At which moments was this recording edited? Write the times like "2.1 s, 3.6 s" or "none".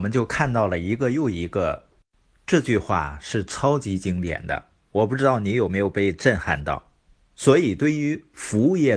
2.0 s, 7.2 s